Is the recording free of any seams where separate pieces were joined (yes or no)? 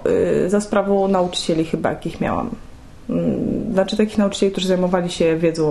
yes